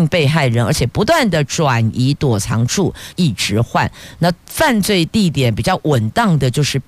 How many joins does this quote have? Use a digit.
1